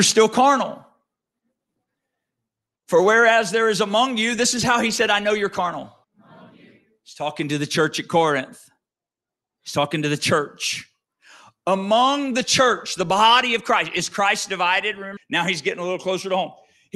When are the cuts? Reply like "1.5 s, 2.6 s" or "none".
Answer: 6.0 s, 15.2 s